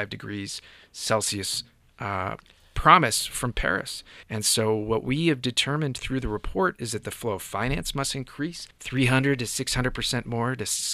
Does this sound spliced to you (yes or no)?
yes